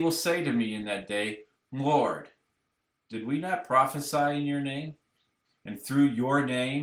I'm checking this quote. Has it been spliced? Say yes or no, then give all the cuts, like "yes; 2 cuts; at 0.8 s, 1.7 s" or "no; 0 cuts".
yes; 2 cuts; at 1.6 s, 5.4 s